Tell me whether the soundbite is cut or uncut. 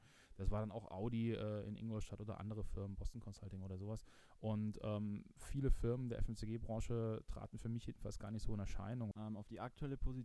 cut